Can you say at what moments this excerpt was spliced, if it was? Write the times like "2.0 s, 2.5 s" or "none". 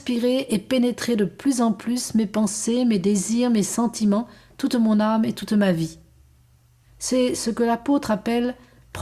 none